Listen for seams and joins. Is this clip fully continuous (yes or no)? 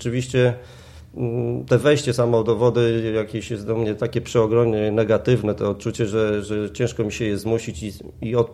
yes